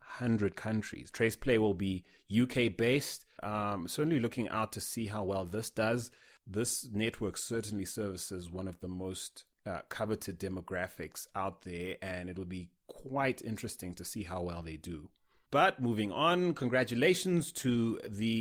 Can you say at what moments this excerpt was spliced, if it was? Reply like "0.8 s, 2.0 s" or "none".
1.1 s, 3.4 s

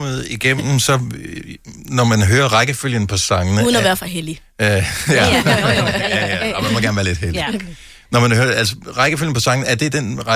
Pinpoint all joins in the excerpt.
none

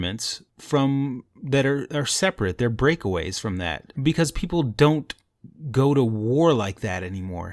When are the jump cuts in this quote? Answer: 4.0 s

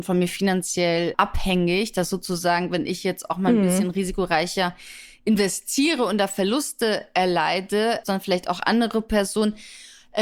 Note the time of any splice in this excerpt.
8.0 s

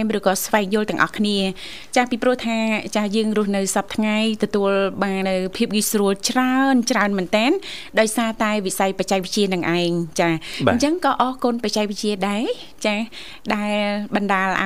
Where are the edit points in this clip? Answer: 5.2 s

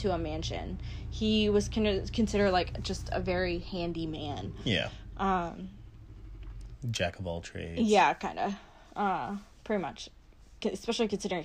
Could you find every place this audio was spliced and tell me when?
none

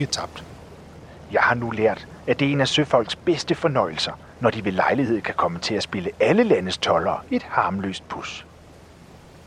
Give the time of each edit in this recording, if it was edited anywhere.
none

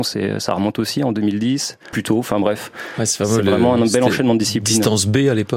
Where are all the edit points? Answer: 1.9 s

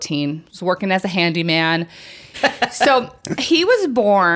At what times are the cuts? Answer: 2.3 s

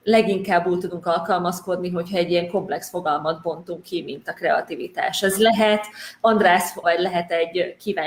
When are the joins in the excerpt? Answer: 6.8 s

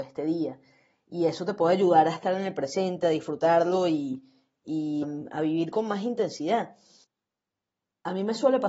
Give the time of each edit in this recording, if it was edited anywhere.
5.0 s

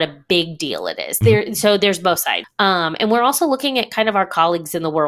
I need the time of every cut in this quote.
2.4 s

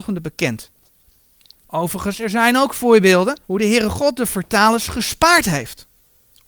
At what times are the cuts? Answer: 1.5 s, 3.4 s

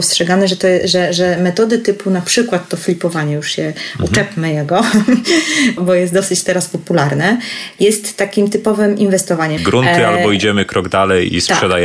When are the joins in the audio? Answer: 5.8 s, 9.6 s

